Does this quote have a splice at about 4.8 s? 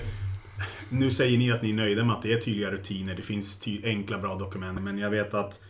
yes; 1 cut; at 4.8 s

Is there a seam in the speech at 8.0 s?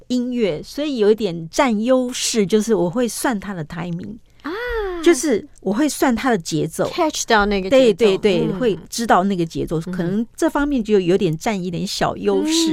no; 1 cut; at 5.6 s

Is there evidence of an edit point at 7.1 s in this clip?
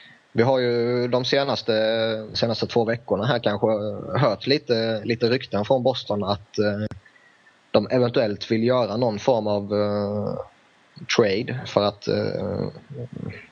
no; 1 cut; at 2.3 s

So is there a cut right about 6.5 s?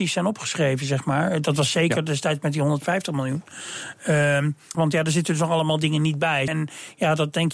yes; 2 cuts; at 4.7 s, 6.5 s

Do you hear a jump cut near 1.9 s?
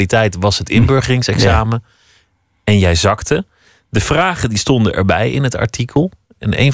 no; 0 cuts

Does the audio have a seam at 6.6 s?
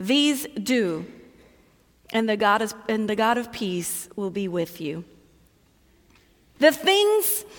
yes; 1 cut; at 6.6 s

